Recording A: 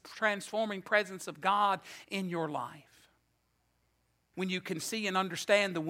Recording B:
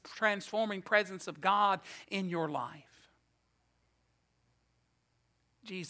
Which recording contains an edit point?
A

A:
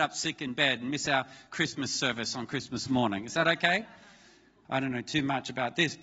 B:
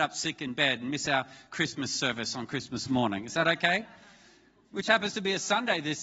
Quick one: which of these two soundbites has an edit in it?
A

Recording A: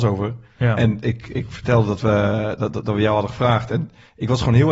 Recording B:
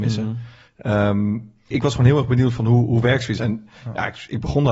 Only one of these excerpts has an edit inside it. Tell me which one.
B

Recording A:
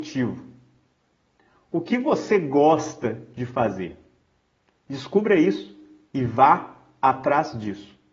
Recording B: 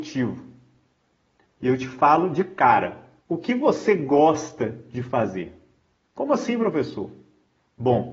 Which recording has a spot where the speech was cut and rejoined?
B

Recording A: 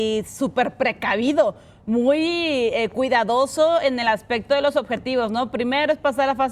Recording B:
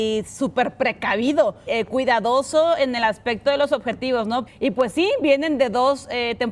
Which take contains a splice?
B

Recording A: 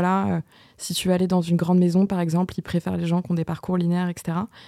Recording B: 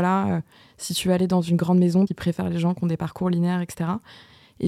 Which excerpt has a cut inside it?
B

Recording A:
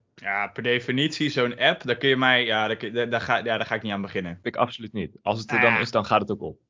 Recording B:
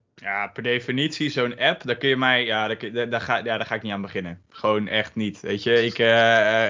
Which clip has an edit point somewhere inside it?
A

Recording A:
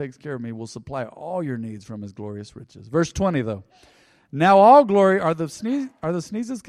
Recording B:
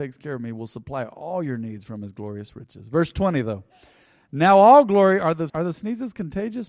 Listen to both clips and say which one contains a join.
B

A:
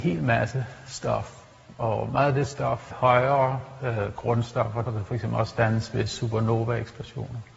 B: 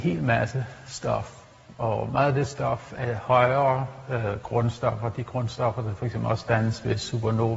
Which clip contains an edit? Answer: A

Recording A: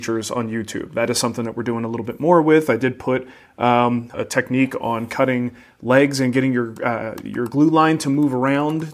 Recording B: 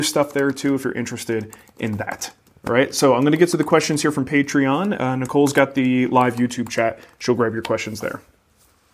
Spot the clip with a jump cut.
A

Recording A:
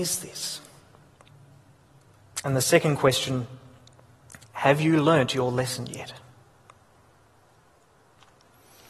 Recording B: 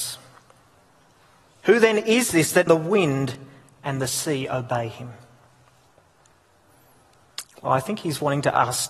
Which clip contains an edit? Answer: B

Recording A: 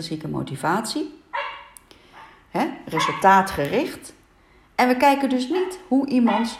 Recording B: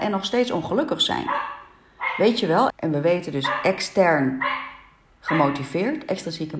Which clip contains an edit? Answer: B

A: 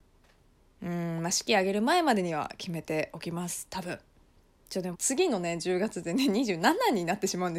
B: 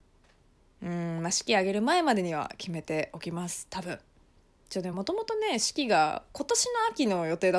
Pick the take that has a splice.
A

